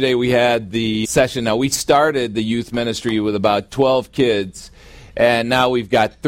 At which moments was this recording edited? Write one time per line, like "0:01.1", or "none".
0:01.0